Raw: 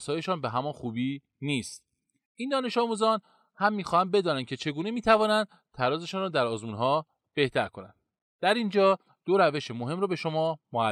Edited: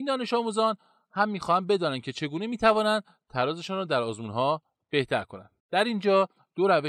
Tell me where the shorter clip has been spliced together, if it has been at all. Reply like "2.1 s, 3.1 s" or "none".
5.6 s

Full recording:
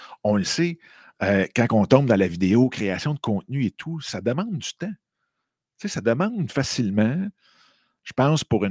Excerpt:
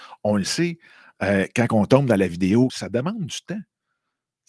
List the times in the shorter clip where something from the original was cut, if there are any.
2.7 s

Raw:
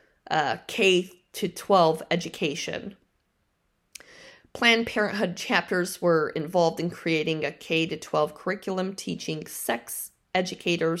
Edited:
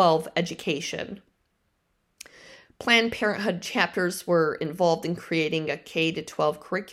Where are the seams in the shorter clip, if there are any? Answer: none

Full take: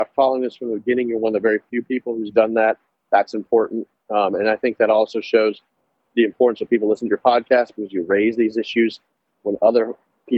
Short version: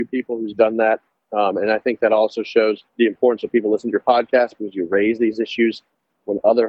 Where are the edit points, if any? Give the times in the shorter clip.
1.2 s, 2.9 s

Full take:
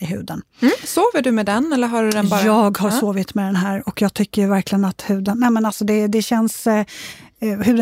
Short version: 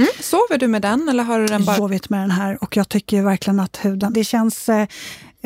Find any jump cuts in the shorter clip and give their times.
1.8 s, 4.1 s

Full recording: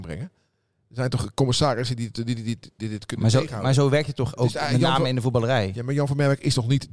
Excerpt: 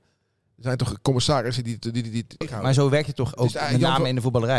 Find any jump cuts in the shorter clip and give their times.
2.4 s

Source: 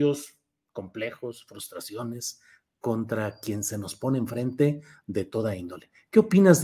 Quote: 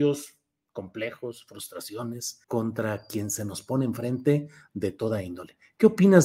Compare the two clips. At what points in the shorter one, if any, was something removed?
2.4 s

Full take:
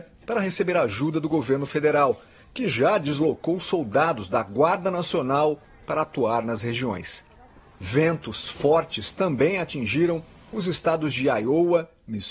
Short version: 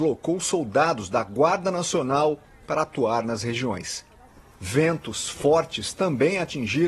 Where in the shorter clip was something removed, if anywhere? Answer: none

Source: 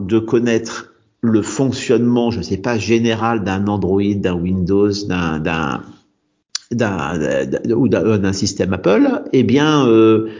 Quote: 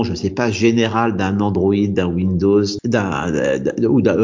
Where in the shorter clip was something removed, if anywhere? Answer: 2.8 s

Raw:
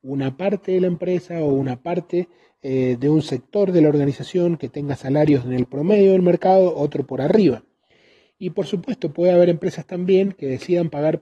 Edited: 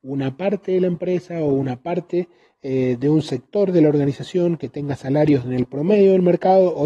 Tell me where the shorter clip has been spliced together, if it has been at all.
none

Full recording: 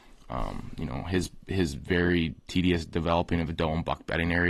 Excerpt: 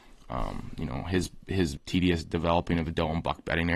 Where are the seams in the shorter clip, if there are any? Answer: 1.8 s

